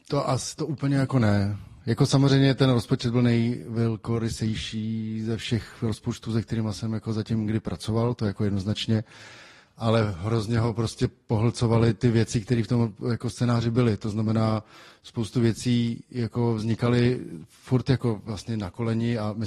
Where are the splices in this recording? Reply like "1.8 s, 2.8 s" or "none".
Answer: none

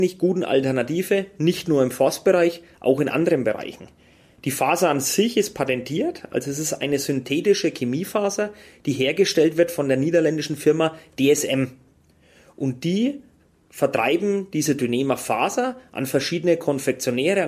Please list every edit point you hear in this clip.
none

